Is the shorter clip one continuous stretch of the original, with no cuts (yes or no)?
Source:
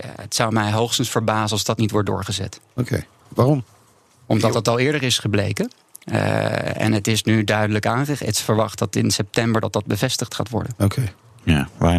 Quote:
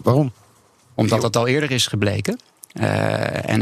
yes